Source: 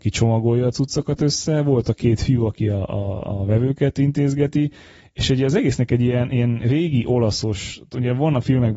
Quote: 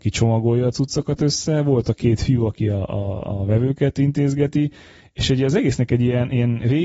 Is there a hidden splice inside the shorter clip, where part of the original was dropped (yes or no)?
no